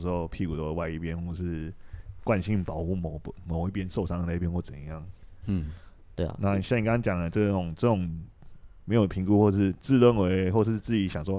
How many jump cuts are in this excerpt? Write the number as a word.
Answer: zero